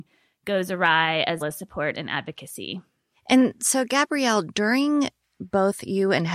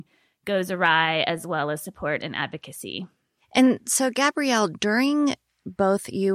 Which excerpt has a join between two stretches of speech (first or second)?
first